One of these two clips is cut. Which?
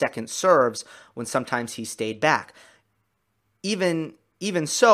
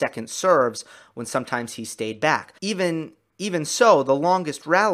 second; 1 cut; at 2.6 s

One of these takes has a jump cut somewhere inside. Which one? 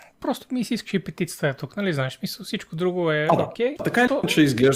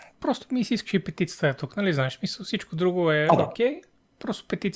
first; 1 cut; at 3.8 s

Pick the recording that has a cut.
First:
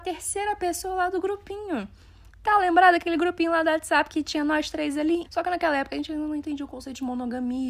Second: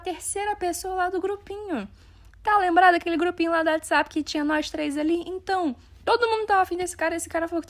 first; 1 cut; at 5.2 s

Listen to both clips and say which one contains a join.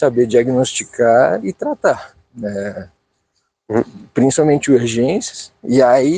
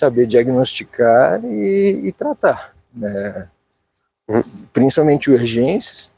first; 1 cut; at 1.4 s

